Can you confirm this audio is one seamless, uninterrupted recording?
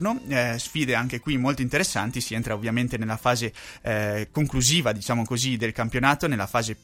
yes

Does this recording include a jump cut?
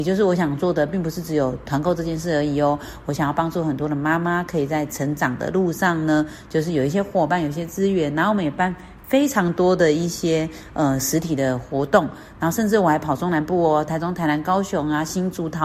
no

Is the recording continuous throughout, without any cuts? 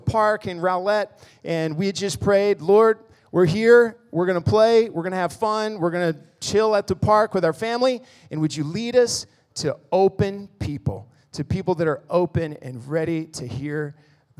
yes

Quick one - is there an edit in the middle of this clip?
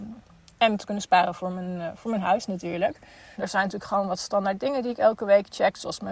yes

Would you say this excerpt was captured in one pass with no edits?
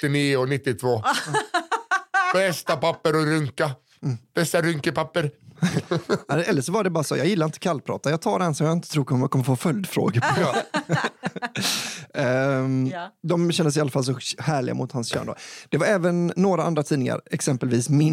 yes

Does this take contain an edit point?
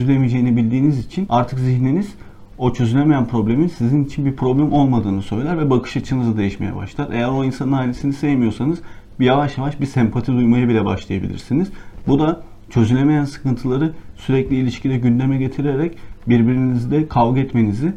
no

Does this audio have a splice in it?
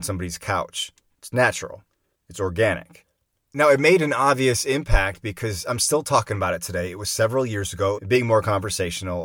yes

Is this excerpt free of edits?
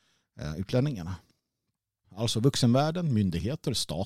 no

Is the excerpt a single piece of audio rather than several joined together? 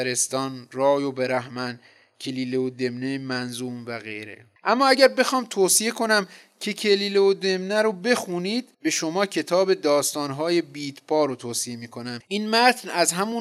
no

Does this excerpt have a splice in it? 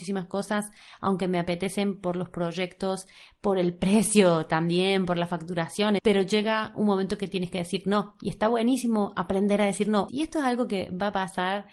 yes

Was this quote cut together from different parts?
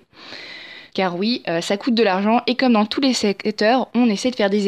yes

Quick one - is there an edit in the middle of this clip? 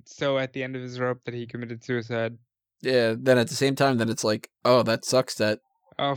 no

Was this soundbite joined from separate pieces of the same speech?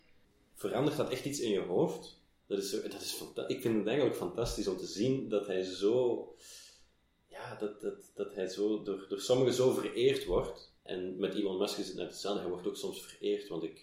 yes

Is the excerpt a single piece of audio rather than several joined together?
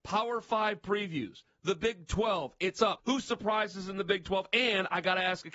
no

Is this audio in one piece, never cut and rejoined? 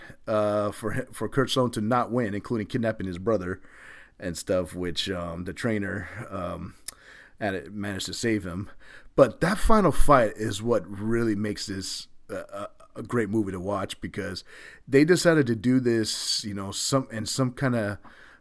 yes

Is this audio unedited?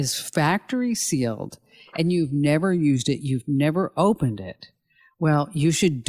yes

